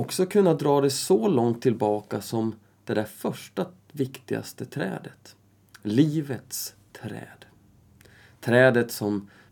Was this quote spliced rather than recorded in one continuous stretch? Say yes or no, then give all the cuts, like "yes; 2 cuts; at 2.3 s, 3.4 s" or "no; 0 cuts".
no; 0 cuts